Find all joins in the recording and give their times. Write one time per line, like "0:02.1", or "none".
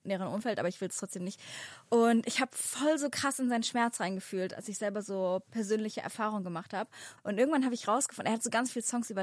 0:07.2